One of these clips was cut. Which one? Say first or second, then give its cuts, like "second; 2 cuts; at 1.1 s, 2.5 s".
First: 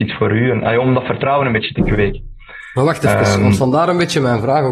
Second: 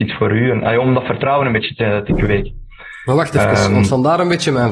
first; 1 cut; at 1.7 s